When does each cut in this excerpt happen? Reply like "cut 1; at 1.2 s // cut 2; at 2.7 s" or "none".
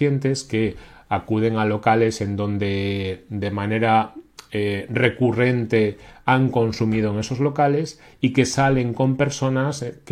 none